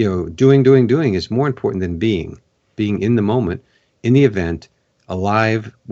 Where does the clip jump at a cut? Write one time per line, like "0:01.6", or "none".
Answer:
0:02.8